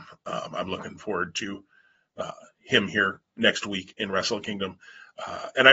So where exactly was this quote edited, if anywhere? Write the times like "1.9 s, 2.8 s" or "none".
none